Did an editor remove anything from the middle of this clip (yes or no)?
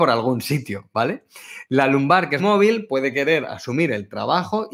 yes